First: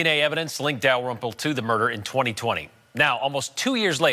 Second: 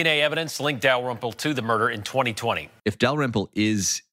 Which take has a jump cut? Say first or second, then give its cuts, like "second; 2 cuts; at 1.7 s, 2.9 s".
second; 1 cut; at 2.8 s